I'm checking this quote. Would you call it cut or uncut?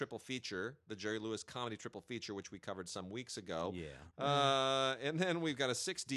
cut